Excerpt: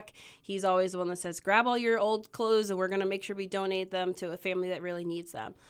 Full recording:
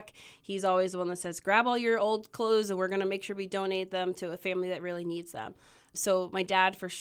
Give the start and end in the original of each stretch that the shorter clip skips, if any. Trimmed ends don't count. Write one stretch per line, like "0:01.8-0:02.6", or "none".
none

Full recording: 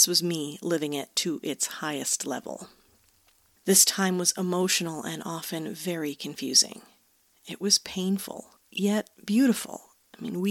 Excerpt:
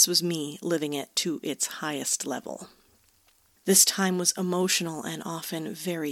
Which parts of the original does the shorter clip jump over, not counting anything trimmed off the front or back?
none

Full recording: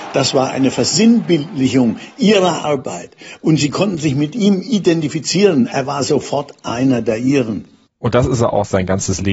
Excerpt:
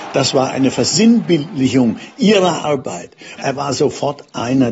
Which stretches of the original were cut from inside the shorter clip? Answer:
0:03.4-0:05.7

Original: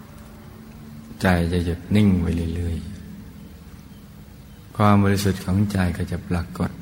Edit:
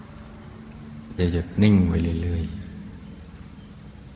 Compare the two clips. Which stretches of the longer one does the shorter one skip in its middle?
0:01.2-0:01.5

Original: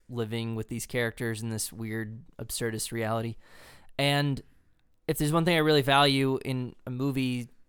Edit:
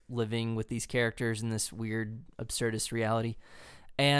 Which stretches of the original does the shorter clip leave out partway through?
none

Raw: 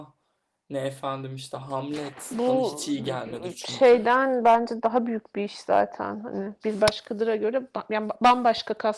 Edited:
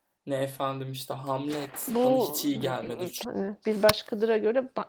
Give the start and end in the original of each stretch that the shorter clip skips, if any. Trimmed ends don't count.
0:03.7-0:06.2

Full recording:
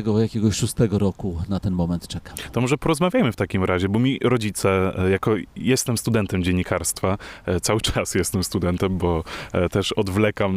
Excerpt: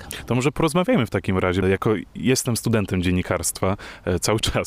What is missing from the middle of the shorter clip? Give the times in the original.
0:03.9-0:05.0

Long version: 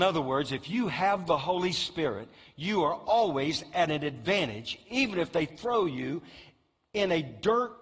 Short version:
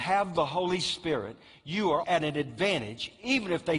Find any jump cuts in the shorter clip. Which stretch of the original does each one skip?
0:03.0-0:03.7

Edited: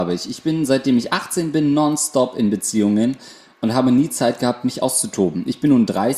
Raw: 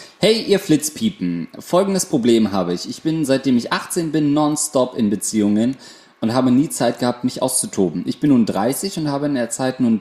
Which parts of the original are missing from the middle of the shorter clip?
none

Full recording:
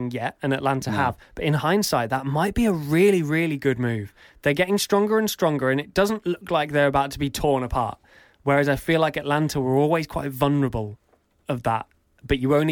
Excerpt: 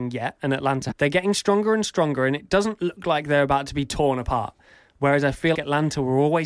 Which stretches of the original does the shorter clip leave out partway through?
0:00.9-0:04.3
0:09.0-0:09.1

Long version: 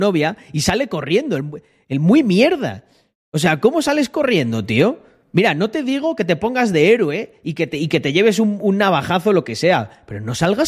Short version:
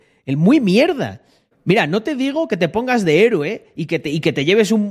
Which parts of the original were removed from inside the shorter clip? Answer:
0:03.1-0:05.2

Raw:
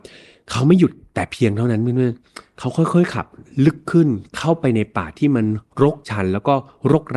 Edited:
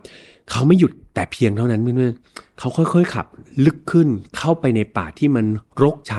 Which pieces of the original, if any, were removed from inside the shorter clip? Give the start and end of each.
none

